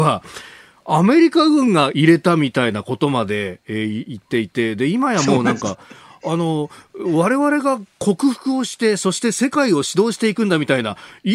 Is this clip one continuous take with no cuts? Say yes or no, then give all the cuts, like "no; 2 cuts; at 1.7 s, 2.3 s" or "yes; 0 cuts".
yes; 0 cuts